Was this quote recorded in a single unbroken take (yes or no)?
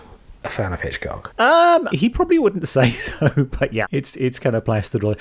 no